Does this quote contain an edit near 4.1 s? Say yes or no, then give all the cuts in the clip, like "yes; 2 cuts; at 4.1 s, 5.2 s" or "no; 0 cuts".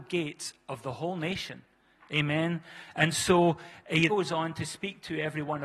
yes; 1 cut; at 4.1 s